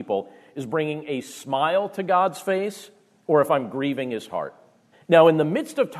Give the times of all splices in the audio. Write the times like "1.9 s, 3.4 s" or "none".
4.9 s